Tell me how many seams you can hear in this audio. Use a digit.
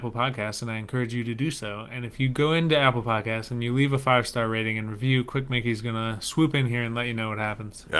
0